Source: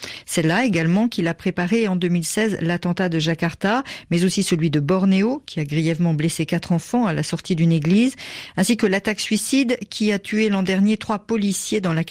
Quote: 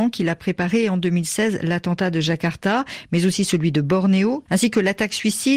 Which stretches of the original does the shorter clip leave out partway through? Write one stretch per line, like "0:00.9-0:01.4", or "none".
0:05.4-0:08.5